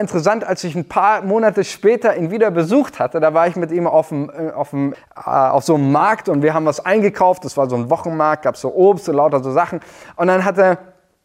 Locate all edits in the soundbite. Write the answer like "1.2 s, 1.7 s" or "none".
4.9 s